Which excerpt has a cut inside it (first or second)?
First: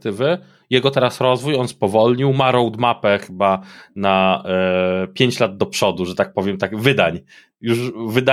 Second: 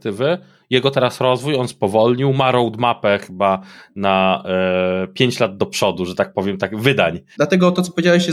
second